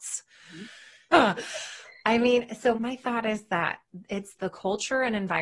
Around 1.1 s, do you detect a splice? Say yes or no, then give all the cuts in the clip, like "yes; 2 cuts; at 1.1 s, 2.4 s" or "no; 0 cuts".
yes; 3 cuts; at 1.1 s, 2.7 s, 4.3 s